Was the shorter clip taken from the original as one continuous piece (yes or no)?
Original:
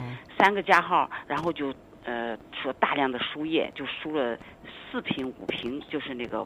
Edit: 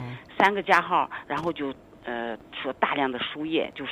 yes